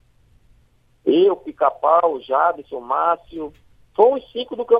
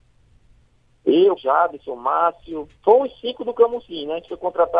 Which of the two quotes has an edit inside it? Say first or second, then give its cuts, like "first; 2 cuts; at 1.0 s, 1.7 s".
second; 2 cuts; at 1.4 s, 2.8 s